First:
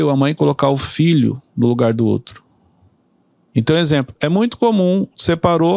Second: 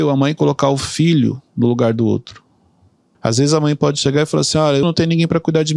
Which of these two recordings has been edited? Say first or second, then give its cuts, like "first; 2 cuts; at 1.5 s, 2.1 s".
second; 2 cuts; at 3.1 s, 4.8 s